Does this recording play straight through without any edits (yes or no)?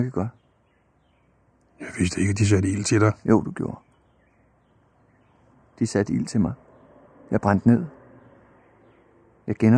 yes